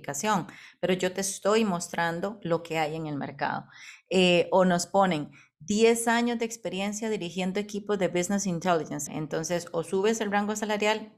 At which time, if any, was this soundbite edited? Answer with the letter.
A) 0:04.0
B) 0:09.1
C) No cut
B